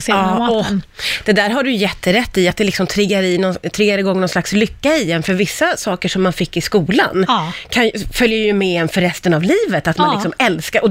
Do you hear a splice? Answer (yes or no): no